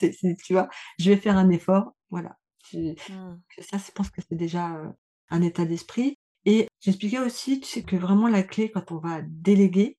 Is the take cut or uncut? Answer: cut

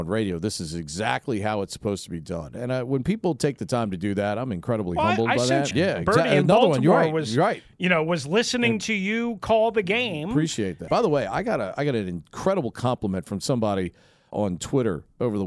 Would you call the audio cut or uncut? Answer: cut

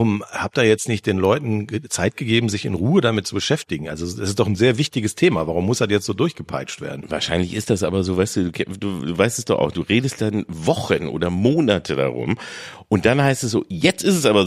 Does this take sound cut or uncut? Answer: uncut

